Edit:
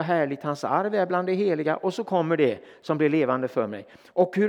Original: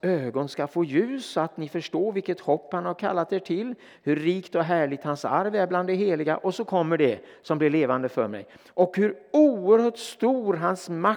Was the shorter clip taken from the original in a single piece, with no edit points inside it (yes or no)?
yes